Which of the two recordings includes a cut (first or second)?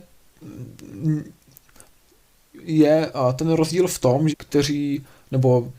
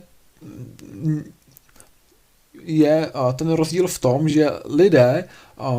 first